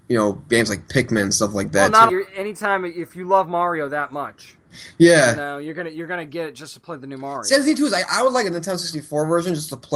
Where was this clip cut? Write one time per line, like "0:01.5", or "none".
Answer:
0:02.1